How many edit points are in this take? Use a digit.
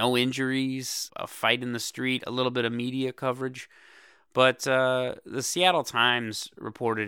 1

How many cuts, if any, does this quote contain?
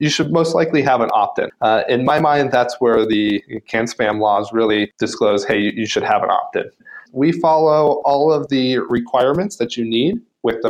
1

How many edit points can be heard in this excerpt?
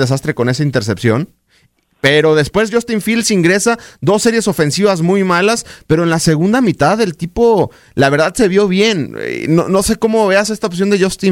0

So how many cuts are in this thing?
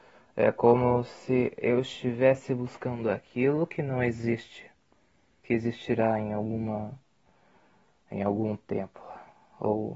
1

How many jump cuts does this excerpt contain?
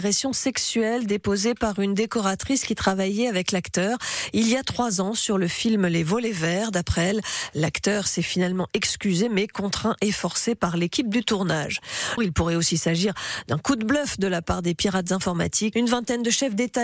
2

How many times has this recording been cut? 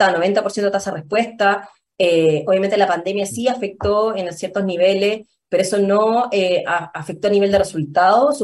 0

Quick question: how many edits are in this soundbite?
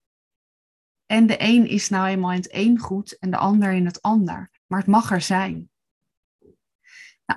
2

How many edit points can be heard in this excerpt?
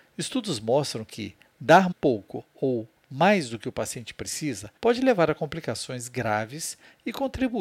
2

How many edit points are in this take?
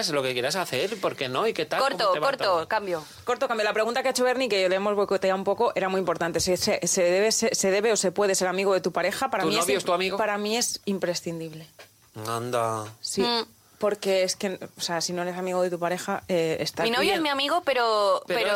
0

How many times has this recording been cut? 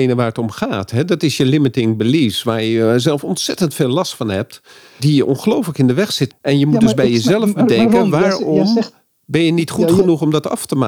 1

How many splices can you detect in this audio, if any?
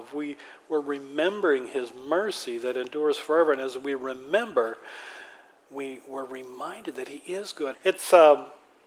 1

